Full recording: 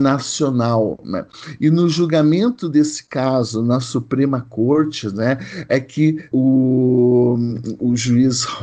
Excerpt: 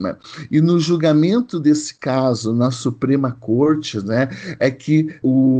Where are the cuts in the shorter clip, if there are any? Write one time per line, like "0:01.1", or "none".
none